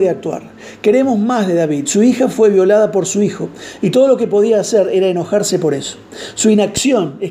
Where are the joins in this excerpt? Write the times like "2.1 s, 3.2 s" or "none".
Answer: none